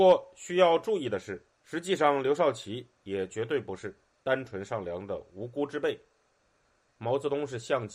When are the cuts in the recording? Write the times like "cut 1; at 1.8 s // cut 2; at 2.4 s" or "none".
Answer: cut 1; at 1.5 s // cut 2; at 6.9 s